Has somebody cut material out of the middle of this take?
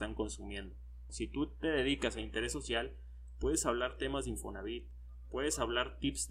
yes; 1 cut; at 1.1 s

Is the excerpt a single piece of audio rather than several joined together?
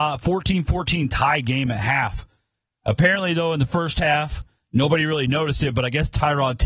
yes; 0 cuts

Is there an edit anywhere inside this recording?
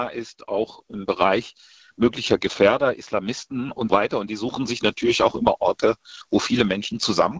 yes; 1 cut; at 3.9 s

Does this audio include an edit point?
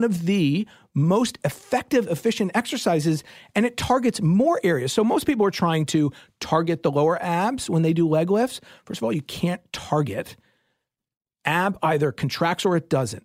no; 0 cuts

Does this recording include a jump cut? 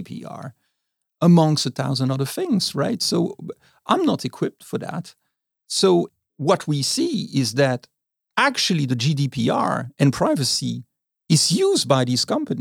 yes; 1 cut; at 6.3 s

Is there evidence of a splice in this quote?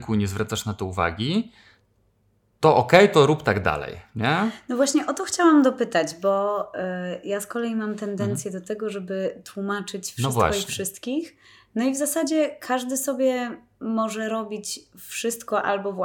no; 0 cuts

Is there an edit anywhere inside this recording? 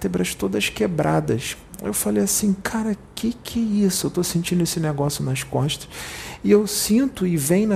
no; 0 cuts

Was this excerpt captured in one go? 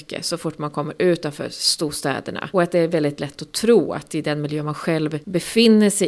yes; 0 cuts

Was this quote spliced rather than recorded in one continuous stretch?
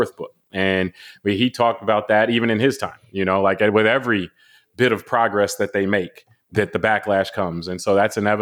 no; 0 cuts

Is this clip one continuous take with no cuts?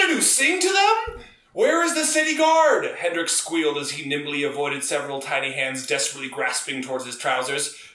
yes; 0 cuts

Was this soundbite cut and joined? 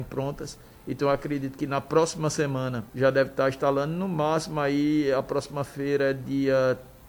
yes; 1 cut; at 2.9 s

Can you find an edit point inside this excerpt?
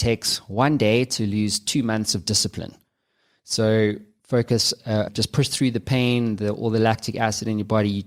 yes; 1 cut; at 5.1 s

